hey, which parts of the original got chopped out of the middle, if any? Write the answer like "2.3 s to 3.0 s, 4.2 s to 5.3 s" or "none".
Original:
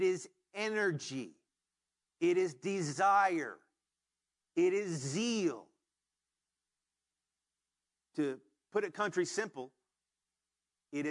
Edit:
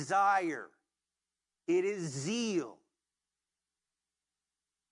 none